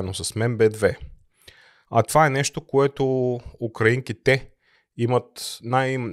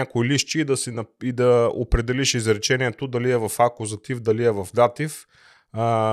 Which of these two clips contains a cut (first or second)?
first